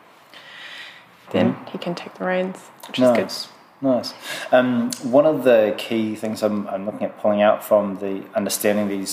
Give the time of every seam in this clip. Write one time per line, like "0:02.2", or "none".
0:01.3